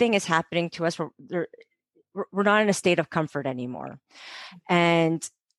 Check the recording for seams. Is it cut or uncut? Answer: uncut